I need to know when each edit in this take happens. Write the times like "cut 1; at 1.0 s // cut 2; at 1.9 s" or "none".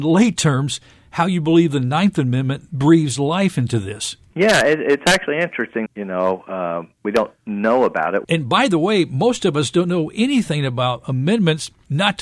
cut 1; at 5.9 s